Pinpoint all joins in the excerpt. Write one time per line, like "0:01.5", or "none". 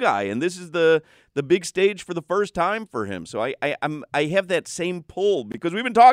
none